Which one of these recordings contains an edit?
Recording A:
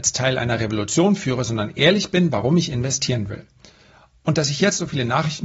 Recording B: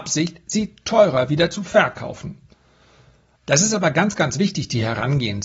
B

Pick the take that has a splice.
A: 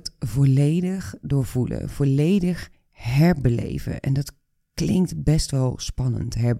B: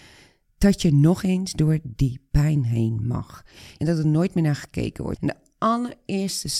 B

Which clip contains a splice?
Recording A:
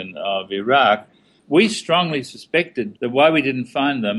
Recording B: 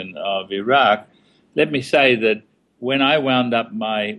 A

